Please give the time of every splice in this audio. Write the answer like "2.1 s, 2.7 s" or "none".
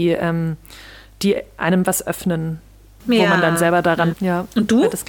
4.1 s